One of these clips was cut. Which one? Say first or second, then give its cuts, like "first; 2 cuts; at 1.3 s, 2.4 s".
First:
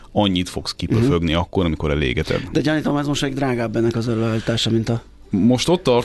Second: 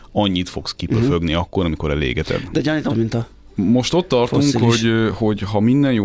second; 1 cut; at 2.9 s